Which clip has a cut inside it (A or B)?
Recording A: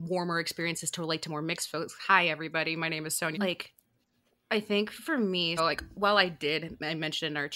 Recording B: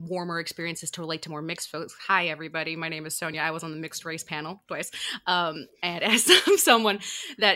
A